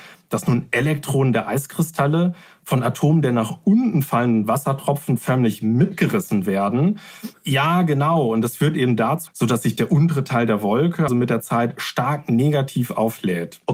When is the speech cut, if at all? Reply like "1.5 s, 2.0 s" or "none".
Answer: 7.3 s, 9.3 s, 11.1 s

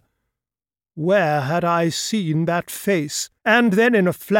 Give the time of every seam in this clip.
3.4 s

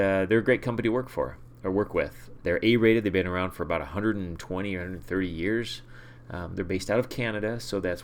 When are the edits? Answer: 2.4 s

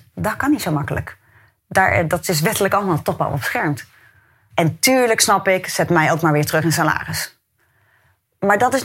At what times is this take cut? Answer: 4.5 s

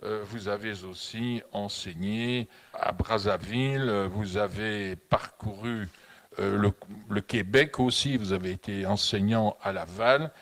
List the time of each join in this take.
2.7 s

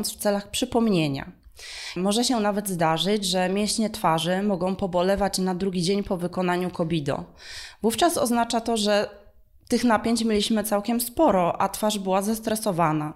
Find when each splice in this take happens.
2.0 s

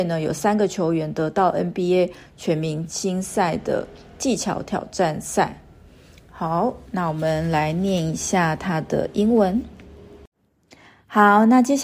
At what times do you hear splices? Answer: none

